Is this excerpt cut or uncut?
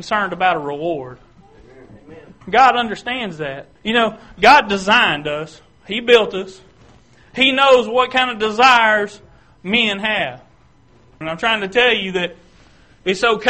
cut